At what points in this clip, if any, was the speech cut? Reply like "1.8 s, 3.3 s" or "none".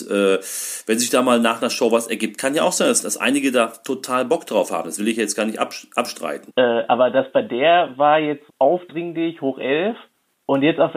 6.5 s, 8.5 s